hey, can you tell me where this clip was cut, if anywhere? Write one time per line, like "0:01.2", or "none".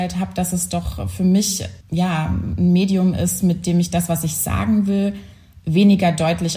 0:01.8